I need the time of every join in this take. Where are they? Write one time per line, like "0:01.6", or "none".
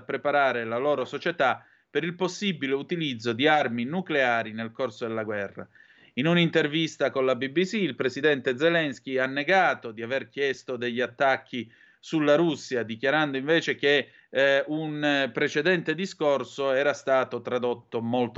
none